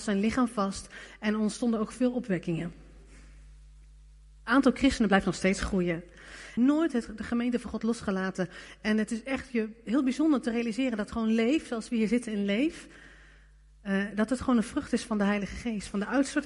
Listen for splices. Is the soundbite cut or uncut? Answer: cut